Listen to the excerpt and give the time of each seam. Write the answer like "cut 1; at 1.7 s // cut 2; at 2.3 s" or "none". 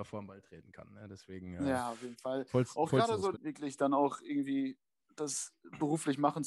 cut 1; at 3.3 s